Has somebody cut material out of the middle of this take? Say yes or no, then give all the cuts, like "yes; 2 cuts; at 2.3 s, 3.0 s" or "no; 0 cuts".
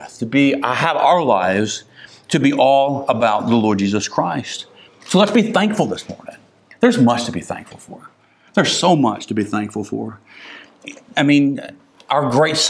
no; 0 cuts